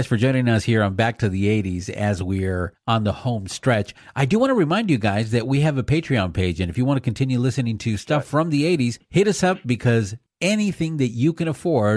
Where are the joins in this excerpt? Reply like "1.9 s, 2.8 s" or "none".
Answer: none